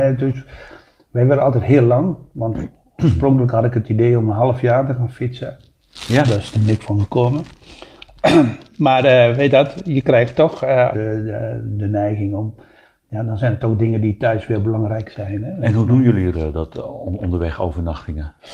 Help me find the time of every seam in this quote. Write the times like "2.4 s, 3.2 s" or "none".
10.9 s, 16.3 s